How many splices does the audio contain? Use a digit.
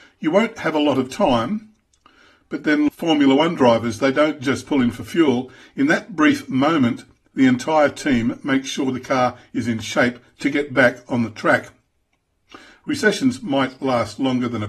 1